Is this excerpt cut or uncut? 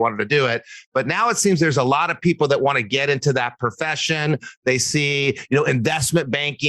uncut